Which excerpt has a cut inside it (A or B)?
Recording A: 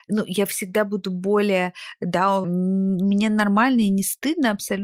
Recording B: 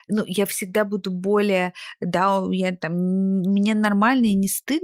A